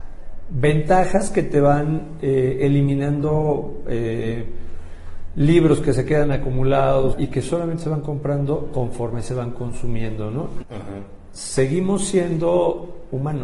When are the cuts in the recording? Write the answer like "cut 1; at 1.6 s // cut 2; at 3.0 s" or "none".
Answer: cut 1; at 7.1 s // cut 2; at 10.6 s

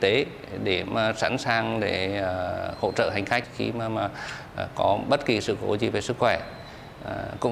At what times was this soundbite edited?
none

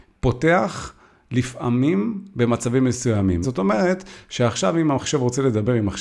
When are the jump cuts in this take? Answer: cut 1; at 3.4 s

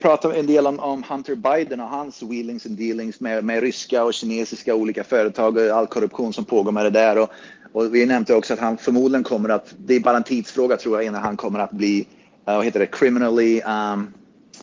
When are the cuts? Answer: none

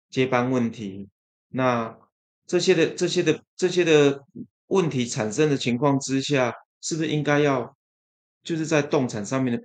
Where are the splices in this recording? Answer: none

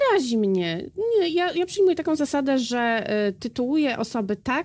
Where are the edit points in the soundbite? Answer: cut 1; at 1.5 s

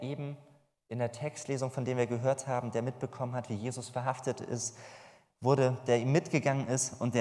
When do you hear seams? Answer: none

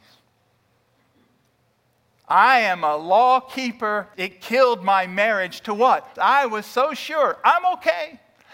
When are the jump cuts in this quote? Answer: cut 1; at 4.1 s // cut 2; at 6.1 s

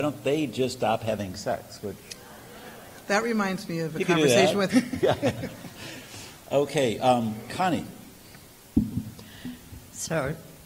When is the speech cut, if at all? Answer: cut 1; at 4.7 s

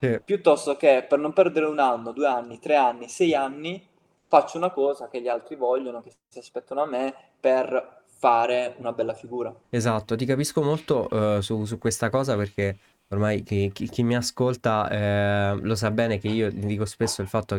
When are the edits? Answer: cut 1; at 9.6 s

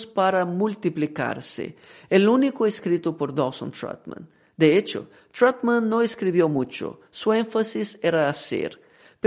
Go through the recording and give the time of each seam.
none

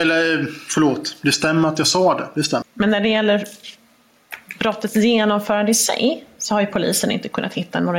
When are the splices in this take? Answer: cut 1; at 2.6 s

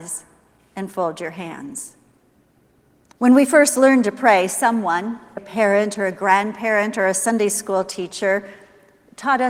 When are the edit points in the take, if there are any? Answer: cut 1; at 3.1 s // cut 2; at 5.4 s

